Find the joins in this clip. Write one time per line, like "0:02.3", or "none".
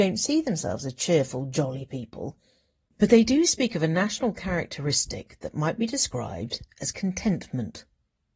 none